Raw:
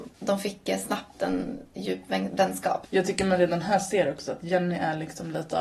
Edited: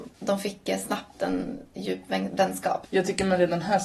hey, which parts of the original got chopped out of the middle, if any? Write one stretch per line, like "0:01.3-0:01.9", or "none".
none